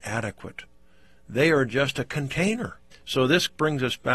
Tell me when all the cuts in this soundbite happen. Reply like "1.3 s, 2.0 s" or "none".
2.9 s